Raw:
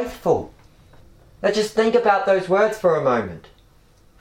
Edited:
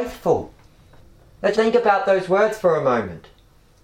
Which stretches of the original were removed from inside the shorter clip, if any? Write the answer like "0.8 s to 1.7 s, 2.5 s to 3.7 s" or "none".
1.5 s to 1.7 s